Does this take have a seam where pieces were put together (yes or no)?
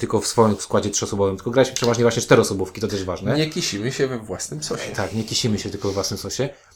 no